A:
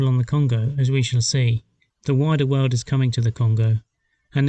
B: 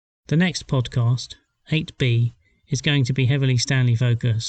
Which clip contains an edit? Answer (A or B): A